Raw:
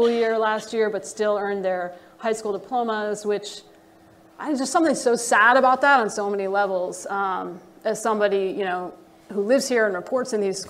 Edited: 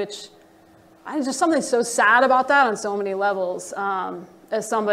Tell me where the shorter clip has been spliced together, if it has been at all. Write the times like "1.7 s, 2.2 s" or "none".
none

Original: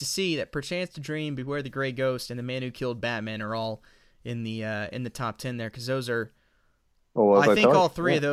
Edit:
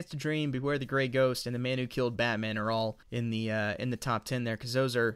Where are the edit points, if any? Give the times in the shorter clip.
3.0 s

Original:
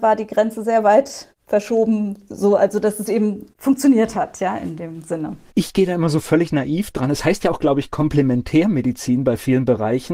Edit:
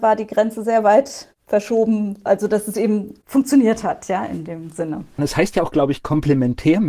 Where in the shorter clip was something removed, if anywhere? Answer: 2.3 s, 5.2 s

